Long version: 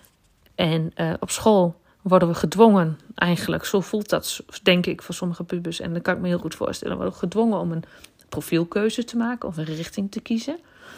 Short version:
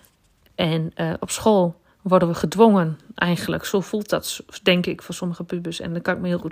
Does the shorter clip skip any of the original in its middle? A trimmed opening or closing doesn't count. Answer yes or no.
no